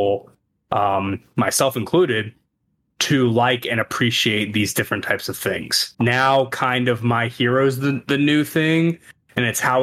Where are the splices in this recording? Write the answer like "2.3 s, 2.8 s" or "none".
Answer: 5.9 s